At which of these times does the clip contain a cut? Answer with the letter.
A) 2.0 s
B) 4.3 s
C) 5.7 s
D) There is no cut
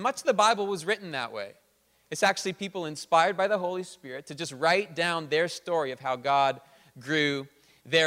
D